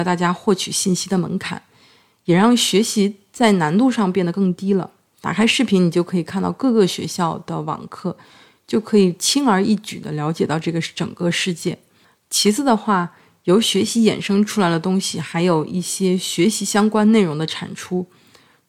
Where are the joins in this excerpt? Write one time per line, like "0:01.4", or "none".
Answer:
none